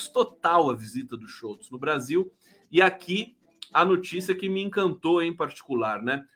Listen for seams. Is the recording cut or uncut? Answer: uncut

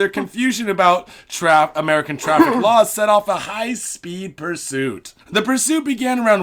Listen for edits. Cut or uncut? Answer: cut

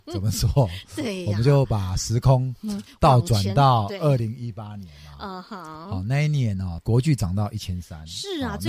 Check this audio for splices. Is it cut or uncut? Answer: uncut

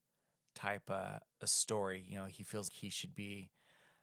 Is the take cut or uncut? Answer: cut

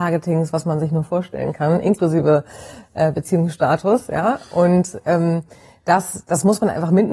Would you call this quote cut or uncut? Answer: uncut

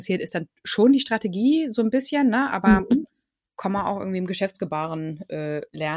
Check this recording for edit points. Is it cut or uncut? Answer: uncut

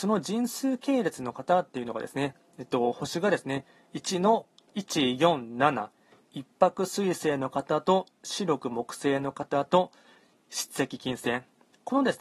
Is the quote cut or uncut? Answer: uncut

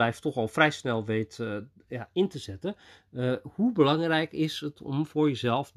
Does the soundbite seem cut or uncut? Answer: uncut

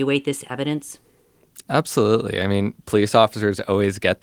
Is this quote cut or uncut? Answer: cut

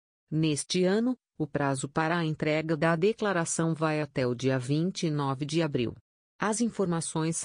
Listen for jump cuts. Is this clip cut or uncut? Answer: uncut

